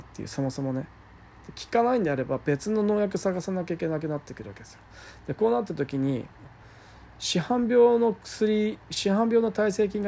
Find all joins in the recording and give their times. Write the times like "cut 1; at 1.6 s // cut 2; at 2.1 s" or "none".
cut 1; at 6.4 s